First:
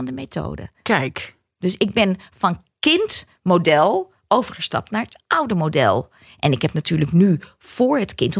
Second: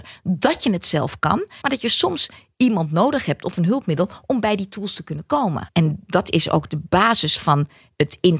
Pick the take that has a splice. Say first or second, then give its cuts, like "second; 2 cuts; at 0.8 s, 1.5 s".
second; 2 cuts; at 1.6 s, 5.7 s